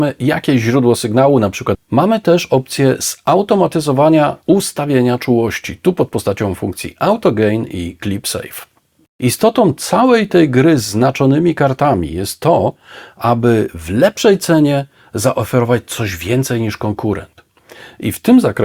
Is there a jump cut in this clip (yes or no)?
yes